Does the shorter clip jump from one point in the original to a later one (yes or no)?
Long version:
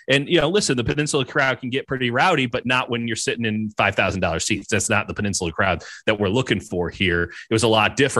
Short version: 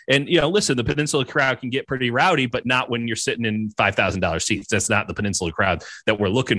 no